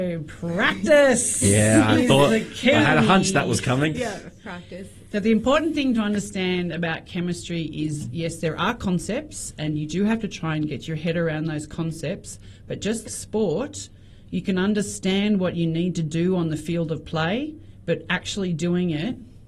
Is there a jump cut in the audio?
yes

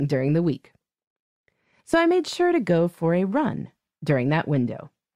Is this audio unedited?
no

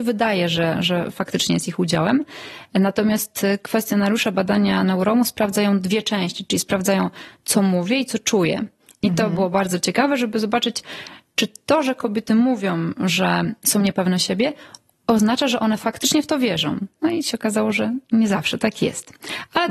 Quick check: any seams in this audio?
no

